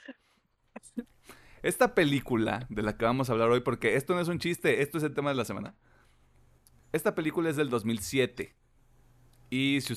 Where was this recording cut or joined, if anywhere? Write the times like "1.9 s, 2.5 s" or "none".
none

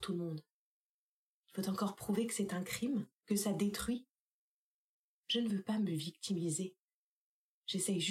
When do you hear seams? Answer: 3.2 s

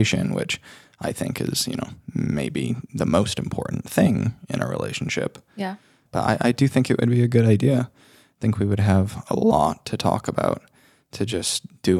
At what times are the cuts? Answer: 6.1 s

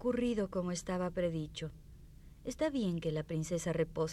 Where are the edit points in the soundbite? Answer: none

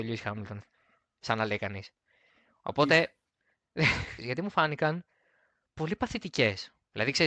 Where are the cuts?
4.2 s

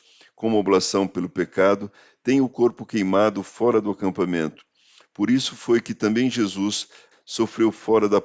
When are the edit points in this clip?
7.1 s

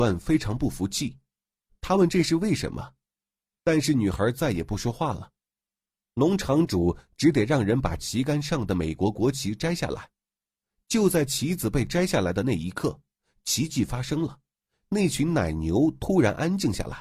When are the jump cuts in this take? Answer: none

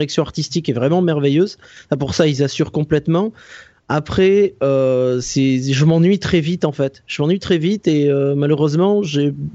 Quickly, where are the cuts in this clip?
5.2 s

